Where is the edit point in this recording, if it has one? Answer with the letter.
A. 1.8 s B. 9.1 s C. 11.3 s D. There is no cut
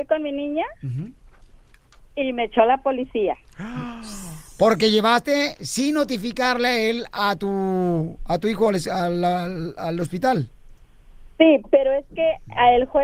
D